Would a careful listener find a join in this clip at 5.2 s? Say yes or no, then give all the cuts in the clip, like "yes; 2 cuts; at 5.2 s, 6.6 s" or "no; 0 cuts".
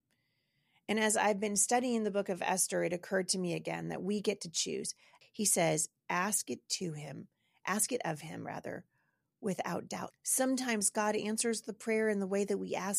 yes; 2 cuts; at 5.2 s, 10.1 s